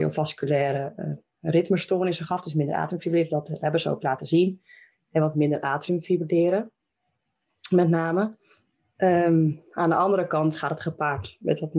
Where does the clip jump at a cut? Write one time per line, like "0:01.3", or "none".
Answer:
0:04.9